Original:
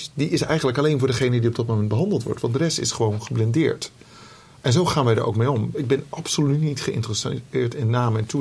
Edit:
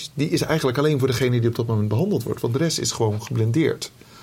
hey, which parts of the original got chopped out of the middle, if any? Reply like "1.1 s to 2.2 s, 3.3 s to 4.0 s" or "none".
none

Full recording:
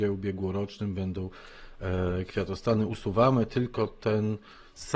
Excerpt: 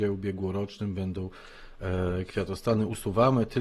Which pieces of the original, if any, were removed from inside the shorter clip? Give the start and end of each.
none

